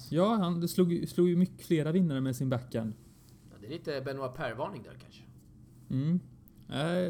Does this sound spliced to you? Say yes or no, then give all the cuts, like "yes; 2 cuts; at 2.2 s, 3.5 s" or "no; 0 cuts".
no; 0 cuts